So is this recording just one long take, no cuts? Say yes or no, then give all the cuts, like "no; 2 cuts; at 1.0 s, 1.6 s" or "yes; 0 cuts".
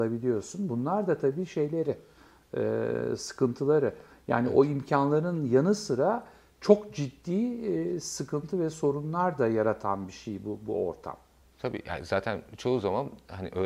yes; 0 cuts